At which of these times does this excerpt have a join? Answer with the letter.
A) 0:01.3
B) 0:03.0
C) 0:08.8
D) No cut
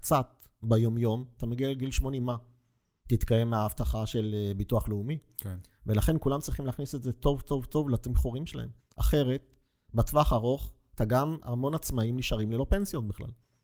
C